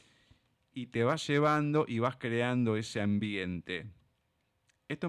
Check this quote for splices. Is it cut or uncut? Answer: uncut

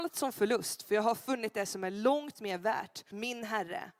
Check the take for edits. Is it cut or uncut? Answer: cut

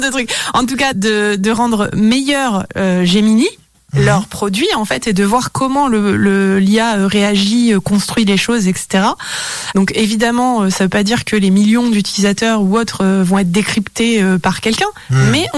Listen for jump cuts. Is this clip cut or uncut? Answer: cut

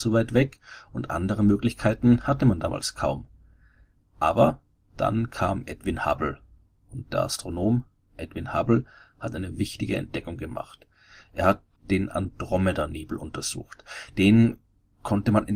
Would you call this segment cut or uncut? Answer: uncut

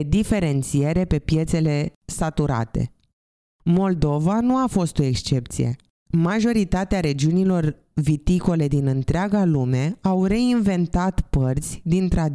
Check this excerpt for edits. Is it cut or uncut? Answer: cut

